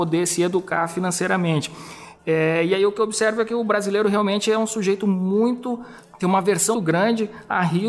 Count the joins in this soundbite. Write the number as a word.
one